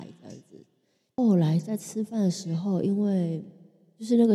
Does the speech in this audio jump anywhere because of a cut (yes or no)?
yes